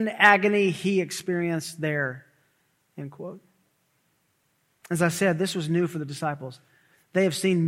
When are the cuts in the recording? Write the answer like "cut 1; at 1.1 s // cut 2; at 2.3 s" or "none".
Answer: none